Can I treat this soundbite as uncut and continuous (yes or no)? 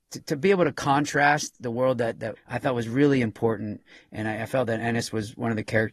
no